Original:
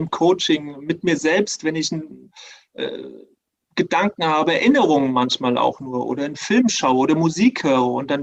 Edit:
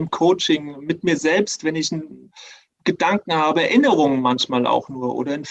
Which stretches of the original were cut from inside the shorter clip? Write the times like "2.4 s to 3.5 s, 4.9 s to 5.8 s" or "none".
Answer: 2.7 s to 3.6 s